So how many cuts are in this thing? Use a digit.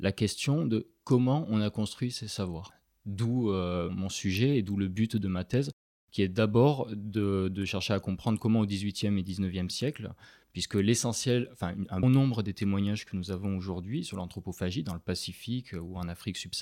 2